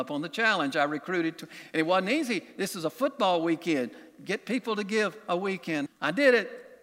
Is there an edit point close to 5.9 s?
yes; 1 cut; at 5.9 s

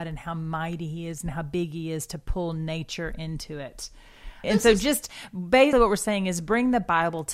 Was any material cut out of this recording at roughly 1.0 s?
no; 2 cuts; at 4.4 s, 5.7 s

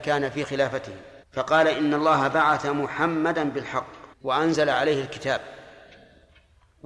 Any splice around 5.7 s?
no; 2 cuts; at 1.2 s, 4.1 s

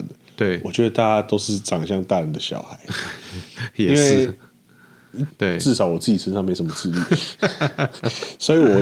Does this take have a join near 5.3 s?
yes; 1 cut; at 5.3 s

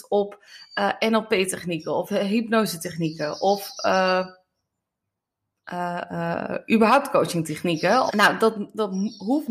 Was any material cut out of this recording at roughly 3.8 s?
no; 1 cut; at 8.1 s

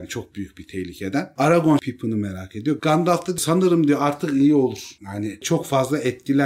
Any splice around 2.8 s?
yes; 1 cut; at 2.8 s

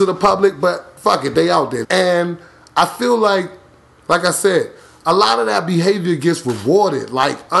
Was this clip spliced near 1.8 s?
yes; 1 cut; at 1.8 s

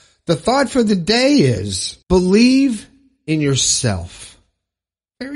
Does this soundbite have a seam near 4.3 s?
no; 1 cut; at 2.0 s

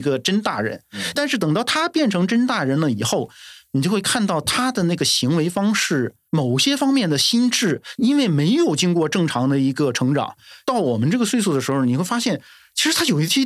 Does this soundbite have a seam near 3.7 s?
no; 1 cut; at 6.3 s

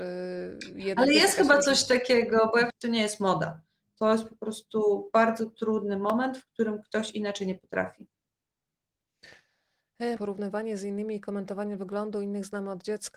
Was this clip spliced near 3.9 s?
no; 2 cuts; at 2.7 s, 10.2 s

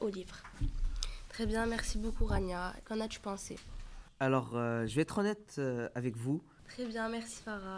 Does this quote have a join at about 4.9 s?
no; 2 cuts; at 2.8 s, 6.6 s

